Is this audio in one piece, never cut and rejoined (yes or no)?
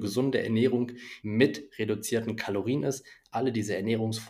no